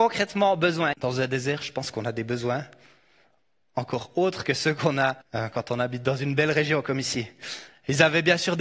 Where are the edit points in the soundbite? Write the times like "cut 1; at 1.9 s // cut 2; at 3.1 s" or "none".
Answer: cut 1; at 0.9 s // cut 2; at 5.2 s